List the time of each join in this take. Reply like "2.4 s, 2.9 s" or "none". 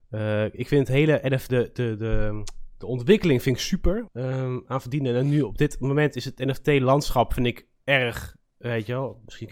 1.5 s, 4.1 s

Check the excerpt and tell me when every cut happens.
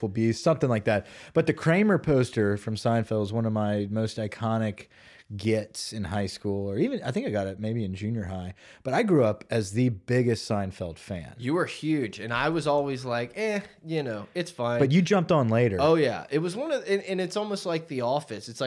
none

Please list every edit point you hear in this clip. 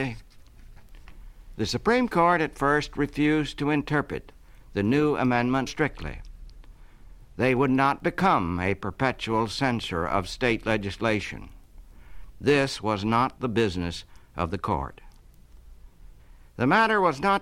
5.7 s, 12.3 s

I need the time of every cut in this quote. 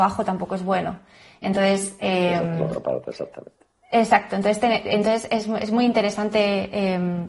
none

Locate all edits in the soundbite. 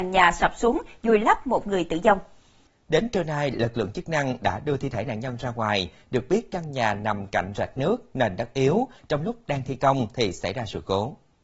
9.0 s

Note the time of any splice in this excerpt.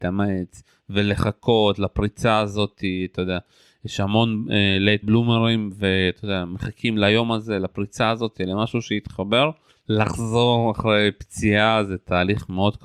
5.0 s, 9.7 s

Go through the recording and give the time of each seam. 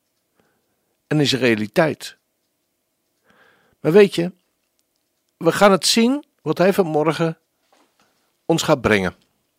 none

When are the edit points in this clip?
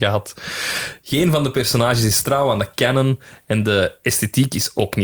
none

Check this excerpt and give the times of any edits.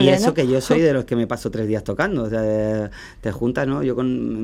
none

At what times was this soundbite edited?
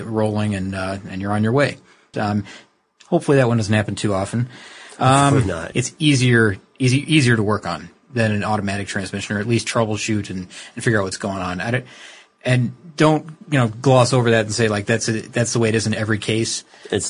2.1 s, 5.7 s

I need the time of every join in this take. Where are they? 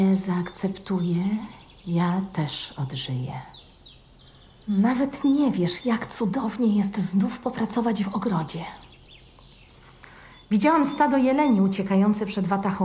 none

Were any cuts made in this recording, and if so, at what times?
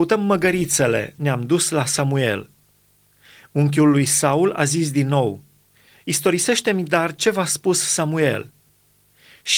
1.2 s

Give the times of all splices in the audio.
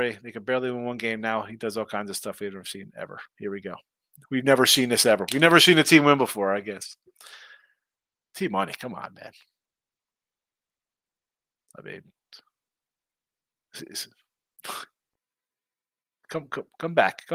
none

